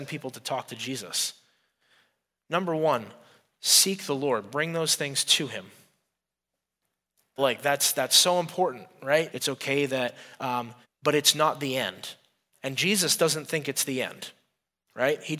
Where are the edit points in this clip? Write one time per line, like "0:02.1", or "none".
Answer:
0:07.4
0:09.3
0:10.8